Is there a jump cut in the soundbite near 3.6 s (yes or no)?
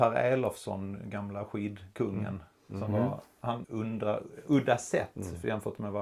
yes